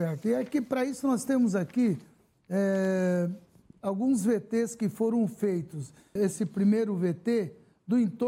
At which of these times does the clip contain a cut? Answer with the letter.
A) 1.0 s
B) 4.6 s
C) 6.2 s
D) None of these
C